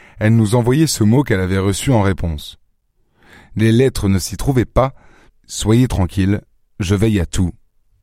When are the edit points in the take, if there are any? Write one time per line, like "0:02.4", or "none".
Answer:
0:05.3

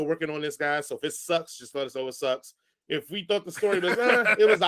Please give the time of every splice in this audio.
0:02.7

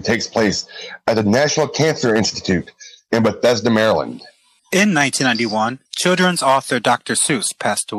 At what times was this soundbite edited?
0:04.6
0:05.9

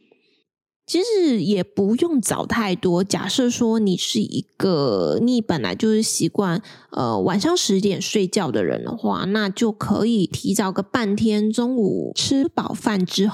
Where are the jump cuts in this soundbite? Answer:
none

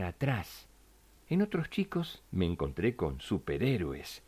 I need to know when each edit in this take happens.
0:01.2
0:02.3

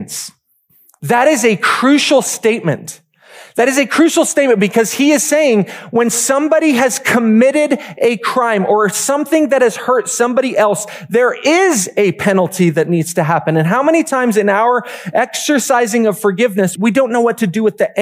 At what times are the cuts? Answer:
0:16.8

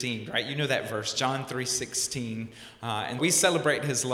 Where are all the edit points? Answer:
0:03.2

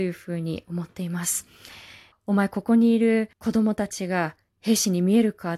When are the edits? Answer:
0:02.1
0:03.3

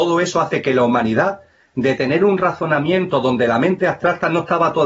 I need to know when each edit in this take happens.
none

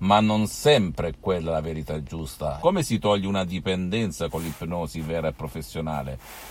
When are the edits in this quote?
0:02.6

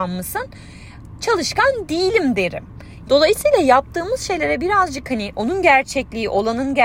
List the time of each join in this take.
0:03.0

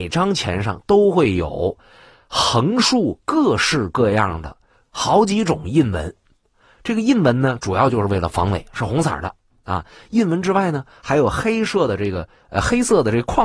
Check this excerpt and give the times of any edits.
none

